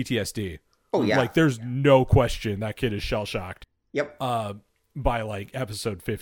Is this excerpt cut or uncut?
uncut